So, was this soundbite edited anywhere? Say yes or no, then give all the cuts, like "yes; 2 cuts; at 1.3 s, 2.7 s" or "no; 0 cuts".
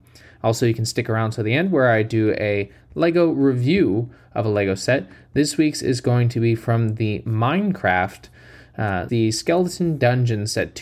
yes; 1 cut; at 9.1 s